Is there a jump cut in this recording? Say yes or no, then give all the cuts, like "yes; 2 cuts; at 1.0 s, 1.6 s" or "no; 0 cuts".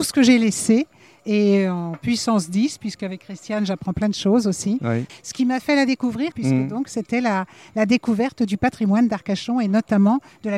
yes; 2 cuts; at 5.1 s, 6.3 s